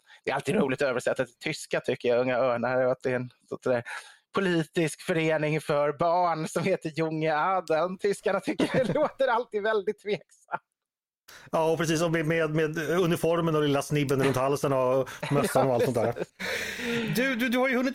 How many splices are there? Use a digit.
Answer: 1